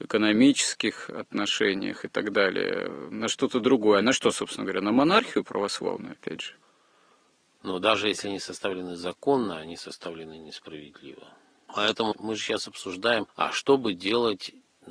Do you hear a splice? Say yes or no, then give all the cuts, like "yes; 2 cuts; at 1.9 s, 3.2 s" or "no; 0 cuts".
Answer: yes; 1 cut; at 7.6 s